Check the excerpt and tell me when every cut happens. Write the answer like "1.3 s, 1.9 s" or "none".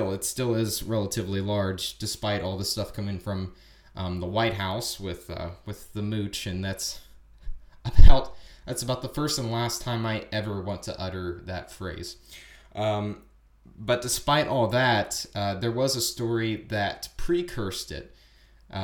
none